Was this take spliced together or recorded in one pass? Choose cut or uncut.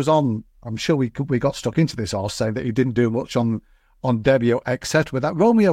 uncut